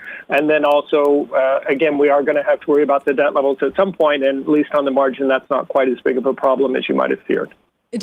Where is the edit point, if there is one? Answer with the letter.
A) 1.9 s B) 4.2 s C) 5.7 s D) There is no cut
D